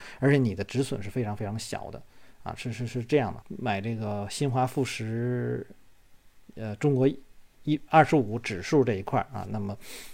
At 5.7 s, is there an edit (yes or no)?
no